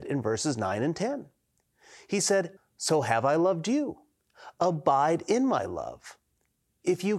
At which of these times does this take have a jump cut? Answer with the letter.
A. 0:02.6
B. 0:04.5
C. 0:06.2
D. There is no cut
A